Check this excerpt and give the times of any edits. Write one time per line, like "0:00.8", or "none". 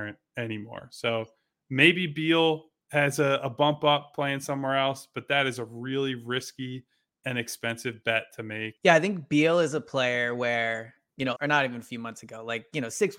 0:08.8
0:11.4